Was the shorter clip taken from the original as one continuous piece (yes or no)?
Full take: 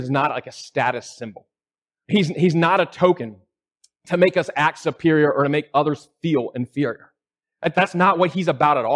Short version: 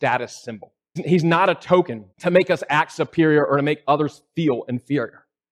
no